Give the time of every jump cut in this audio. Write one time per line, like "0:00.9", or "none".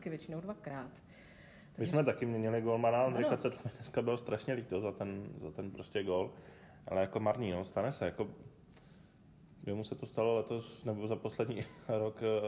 none